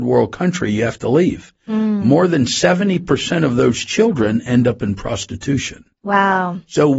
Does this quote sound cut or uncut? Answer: uncut